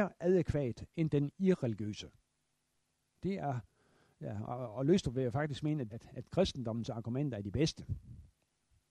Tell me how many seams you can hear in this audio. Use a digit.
2